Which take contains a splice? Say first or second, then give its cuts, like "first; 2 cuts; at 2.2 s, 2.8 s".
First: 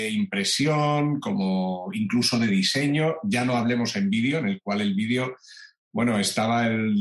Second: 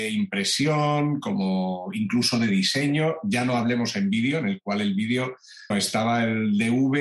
second; 1 cut; at 5.7 s